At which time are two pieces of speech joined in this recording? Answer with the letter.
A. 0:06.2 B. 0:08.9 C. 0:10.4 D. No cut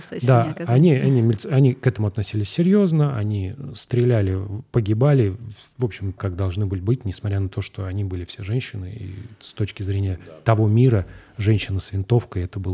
A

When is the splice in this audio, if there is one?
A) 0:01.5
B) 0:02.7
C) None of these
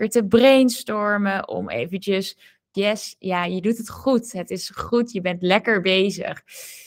B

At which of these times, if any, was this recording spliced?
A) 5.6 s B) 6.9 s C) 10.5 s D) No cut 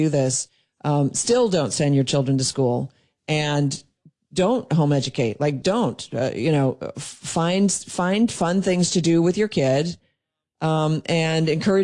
A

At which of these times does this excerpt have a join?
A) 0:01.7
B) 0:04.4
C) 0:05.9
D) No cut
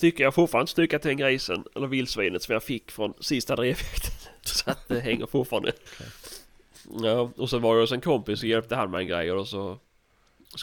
C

